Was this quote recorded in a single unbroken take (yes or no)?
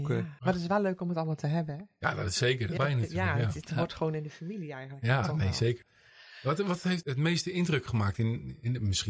no